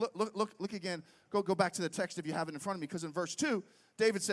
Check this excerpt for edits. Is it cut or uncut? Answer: uncut